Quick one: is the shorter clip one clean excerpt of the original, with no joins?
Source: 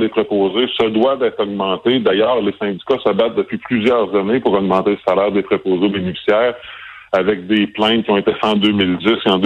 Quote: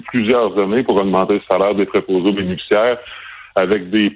yes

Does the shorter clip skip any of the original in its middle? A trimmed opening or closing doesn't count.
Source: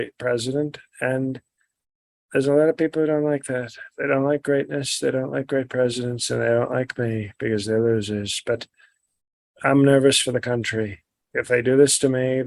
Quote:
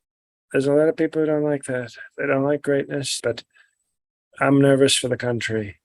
yes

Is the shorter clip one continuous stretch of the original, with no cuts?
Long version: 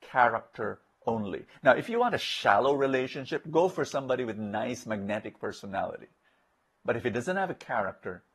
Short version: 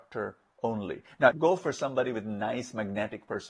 no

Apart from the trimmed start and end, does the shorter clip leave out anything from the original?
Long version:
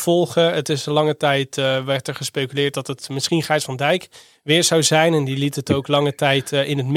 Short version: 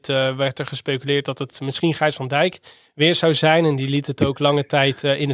no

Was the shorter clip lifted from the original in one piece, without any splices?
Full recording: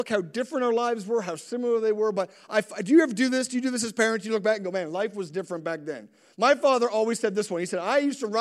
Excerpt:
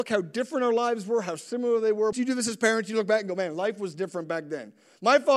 no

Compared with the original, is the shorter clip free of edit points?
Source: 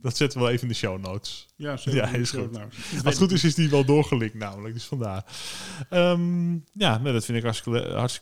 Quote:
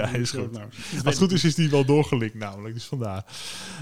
yes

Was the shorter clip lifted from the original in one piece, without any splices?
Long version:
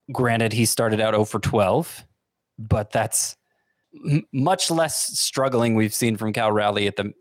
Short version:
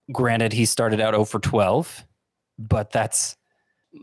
yes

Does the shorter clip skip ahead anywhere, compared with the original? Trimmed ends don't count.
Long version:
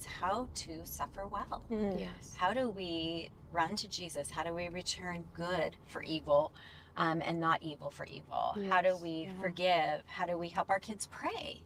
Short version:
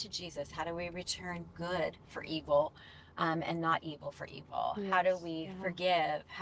no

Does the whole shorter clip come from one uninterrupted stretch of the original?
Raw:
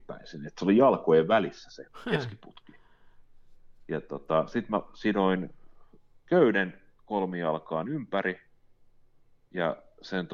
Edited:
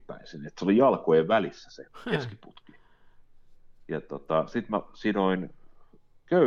yes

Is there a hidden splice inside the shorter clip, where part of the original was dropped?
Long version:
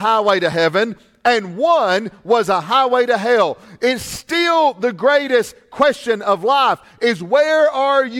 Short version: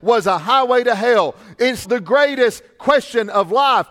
yes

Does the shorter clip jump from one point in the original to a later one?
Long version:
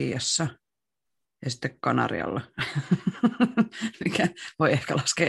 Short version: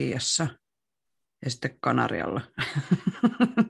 no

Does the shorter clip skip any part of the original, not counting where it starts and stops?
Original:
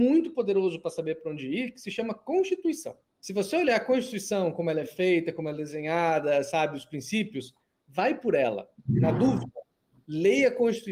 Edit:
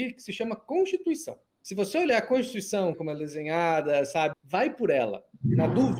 yes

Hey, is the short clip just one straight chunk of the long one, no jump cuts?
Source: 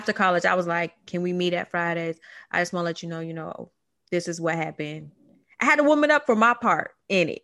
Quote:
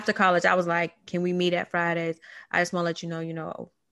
yes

